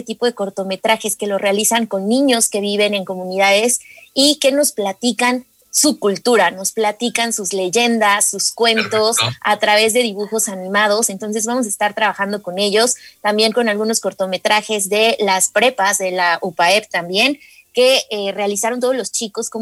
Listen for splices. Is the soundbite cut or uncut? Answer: uncut